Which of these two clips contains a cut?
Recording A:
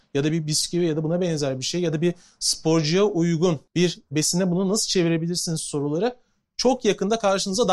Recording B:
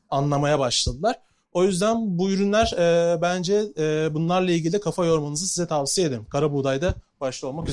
A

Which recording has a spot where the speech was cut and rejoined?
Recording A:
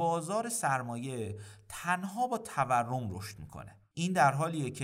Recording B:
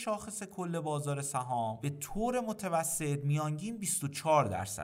A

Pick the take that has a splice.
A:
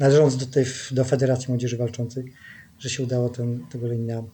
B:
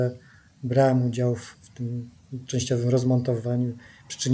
B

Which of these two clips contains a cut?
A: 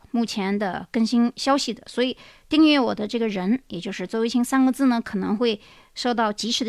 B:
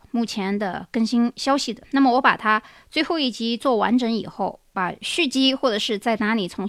B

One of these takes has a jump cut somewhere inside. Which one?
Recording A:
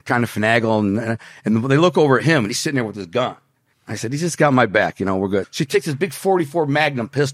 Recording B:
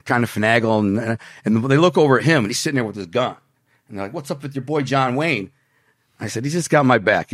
A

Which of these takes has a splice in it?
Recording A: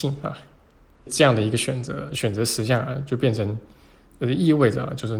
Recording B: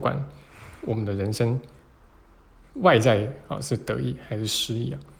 A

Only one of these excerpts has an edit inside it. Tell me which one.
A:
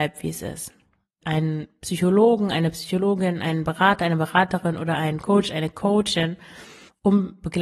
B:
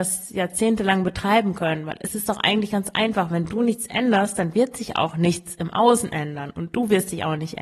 A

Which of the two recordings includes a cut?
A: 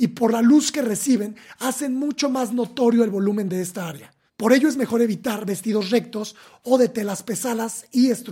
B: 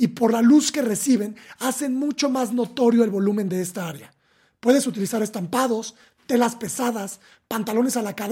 A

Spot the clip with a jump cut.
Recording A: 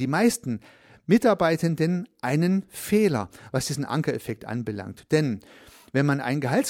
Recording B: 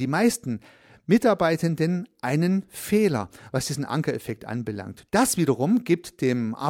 B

